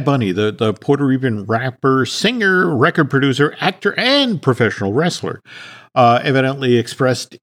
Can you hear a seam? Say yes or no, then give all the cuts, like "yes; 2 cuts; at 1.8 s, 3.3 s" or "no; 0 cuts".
no; 0 cuts